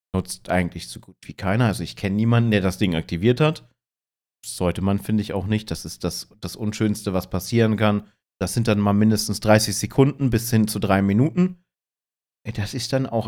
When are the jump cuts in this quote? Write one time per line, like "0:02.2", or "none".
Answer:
0:08.2